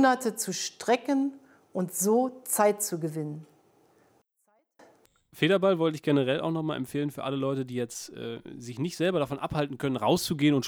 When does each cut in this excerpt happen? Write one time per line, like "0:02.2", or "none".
none